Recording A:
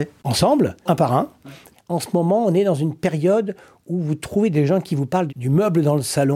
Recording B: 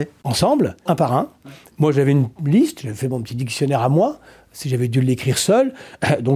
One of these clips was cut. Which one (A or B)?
A